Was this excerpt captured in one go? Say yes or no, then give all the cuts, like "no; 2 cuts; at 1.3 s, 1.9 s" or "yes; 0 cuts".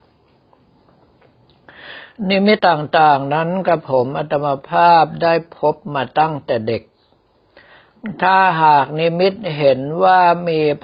no; 1 cut; at 2.6 s